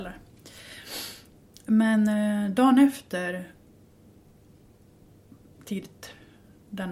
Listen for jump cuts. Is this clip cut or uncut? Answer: cut